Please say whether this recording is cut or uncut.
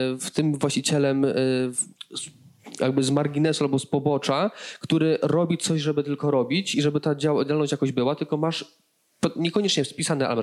uncut